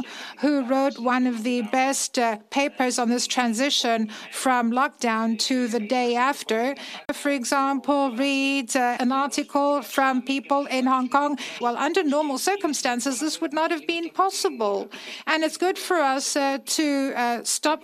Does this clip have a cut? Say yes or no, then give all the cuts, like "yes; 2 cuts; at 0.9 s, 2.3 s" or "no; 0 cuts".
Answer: yes; 3 cuts; at 7.0 s, 9.0 s, 11.6 s